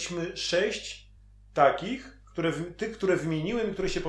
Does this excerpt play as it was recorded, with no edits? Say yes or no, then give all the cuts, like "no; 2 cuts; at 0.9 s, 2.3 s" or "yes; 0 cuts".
yes; 0 cuts